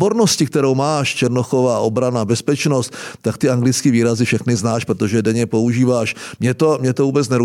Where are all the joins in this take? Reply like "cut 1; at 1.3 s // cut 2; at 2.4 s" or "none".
cut 1; at 4.9 s // cut 2; at 6.4 s